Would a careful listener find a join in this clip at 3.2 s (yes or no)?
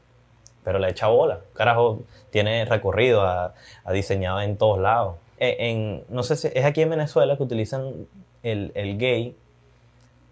no